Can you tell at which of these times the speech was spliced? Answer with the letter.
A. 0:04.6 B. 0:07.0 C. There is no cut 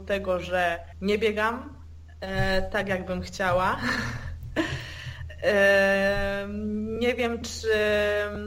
C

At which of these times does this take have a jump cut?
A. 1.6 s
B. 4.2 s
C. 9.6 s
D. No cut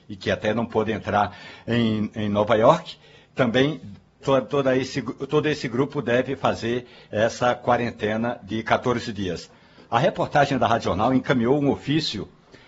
B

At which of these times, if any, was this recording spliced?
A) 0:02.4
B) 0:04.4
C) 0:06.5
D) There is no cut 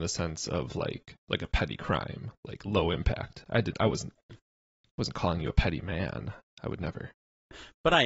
D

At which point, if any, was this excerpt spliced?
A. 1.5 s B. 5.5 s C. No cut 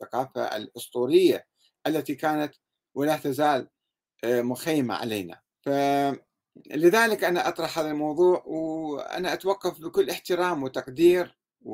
B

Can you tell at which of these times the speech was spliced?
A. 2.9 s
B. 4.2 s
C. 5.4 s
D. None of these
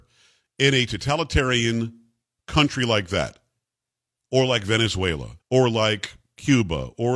C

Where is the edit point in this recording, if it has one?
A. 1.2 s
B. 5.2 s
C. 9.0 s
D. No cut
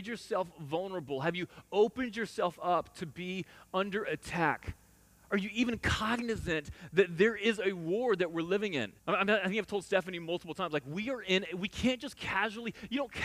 C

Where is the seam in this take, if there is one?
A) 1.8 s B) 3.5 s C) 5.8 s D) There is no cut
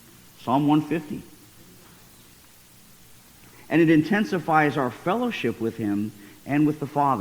B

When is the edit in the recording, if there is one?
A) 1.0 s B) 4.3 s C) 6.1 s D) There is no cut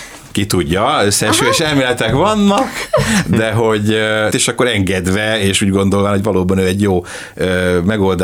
B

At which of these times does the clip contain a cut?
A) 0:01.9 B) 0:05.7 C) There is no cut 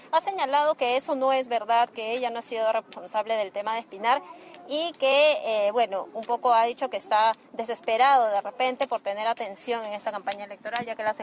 C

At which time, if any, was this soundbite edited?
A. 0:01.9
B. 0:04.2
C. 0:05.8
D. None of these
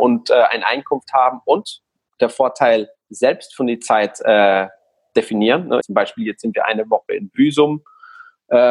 C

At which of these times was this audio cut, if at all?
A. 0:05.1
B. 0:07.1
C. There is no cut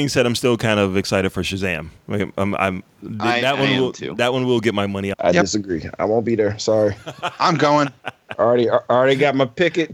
A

